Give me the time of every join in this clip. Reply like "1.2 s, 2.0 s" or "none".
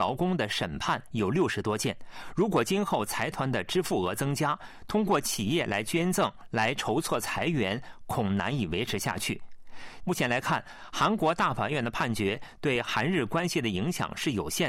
10.0 s